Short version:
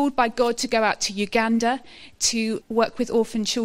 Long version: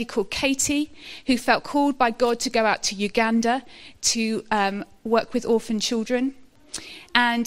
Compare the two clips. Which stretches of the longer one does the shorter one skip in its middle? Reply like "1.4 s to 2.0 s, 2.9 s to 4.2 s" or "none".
4.4 s to 5.0 s

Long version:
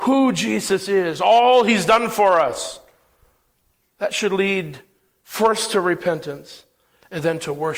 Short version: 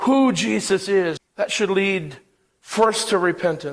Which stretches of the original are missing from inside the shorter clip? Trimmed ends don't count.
1.2 s to 3.8 s

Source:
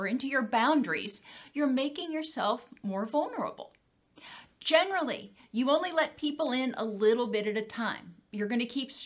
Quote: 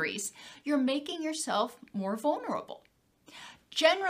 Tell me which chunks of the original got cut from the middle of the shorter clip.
none

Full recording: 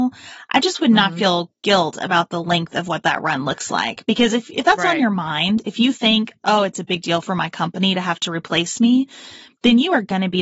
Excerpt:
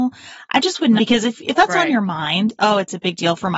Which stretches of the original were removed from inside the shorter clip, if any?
1.0 s to 4.0 s, 5.6 s to 6.4 s

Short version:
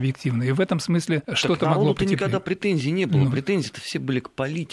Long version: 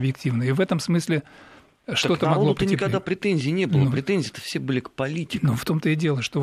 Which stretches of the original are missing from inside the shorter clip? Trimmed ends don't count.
1.2 s to 1.9 s

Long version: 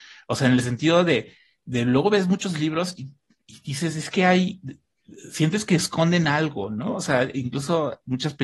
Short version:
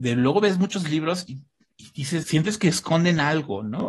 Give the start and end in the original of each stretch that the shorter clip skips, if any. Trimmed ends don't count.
3.9 s to 5.3 s

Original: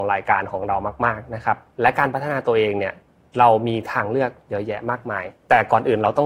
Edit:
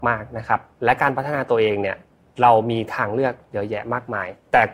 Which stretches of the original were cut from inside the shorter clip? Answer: none

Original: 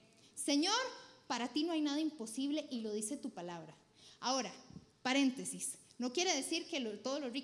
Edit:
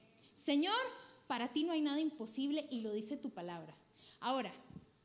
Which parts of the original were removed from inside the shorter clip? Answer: none

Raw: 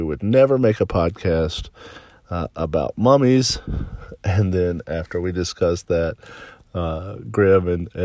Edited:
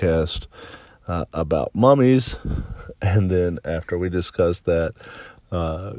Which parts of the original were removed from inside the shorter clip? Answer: none

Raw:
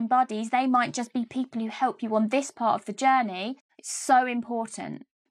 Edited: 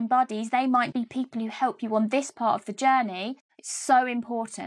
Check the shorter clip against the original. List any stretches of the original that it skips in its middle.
0.9 s to 1.1 s

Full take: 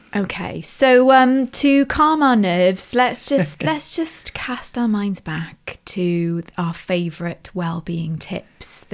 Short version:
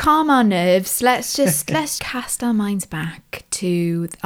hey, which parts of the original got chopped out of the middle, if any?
3.9 s to 4.3 s

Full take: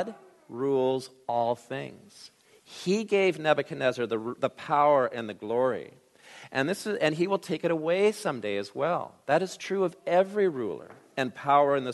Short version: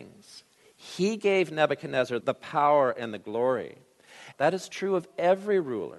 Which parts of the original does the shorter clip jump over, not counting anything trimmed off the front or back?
4.1 s to 4.4 s, 6.5 s to 9.2 s

